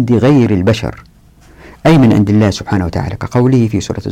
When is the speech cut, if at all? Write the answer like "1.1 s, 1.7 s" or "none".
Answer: none